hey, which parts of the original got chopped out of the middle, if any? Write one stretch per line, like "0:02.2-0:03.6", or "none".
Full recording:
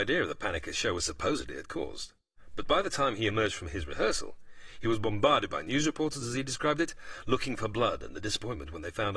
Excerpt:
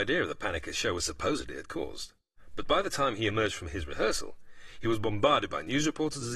none